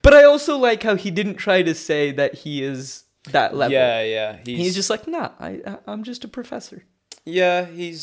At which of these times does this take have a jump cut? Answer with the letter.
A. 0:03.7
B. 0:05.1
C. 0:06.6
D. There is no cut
D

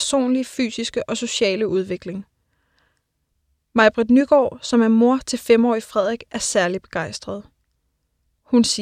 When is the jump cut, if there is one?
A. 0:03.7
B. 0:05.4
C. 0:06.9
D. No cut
D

